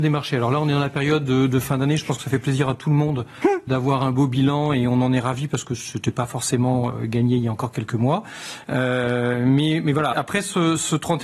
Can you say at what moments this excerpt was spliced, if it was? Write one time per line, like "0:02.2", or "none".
0:08.6
0:10.1